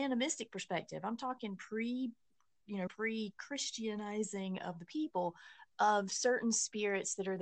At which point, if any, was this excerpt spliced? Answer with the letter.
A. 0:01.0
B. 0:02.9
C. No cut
B